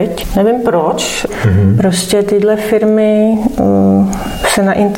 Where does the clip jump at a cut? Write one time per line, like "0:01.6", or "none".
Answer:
0:01.3